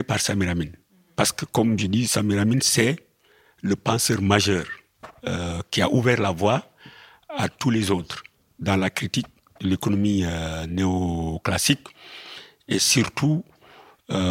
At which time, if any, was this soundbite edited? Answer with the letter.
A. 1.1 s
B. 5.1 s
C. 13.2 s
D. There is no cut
A